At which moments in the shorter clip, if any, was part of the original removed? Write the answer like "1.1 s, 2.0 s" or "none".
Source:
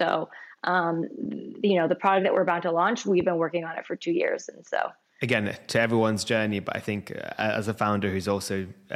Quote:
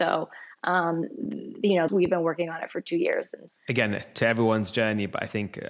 1.9 s, 3.5 s